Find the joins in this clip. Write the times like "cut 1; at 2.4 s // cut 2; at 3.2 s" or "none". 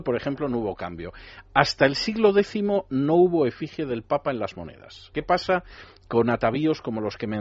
cut 1; at 5.1 s